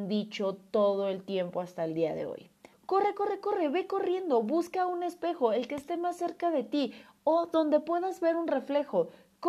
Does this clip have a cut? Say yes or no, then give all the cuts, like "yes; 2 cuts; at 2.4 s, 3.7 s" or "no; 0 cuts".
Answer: yes; 1 cut; at 2.7 s